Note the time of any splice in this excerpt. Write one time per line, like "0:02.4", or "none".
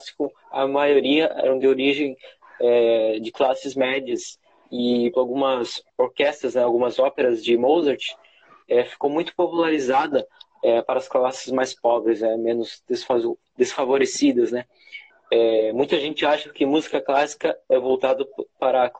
0:05.1
0:15.1

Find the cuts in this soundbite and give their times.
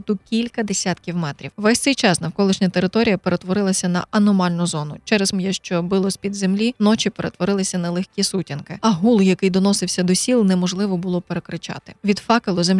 0:01.5
0:05.3

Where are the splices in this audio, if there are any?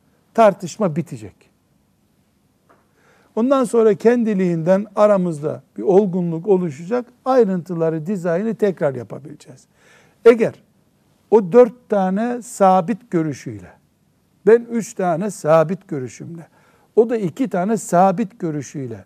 none

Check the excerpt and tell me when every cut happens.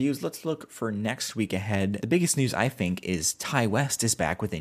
none

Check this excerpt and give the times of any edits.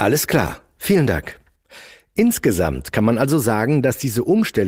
none

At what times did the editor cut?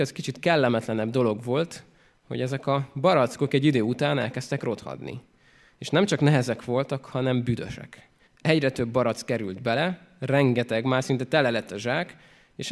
0:08.3

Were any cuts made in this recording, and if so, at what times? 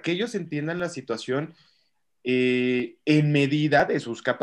none

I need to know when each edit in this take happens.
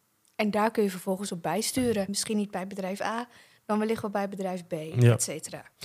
0:02.1

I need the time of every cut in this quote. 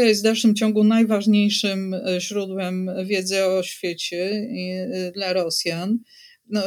none

